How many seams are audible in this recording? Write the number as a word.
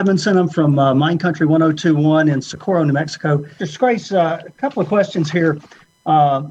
one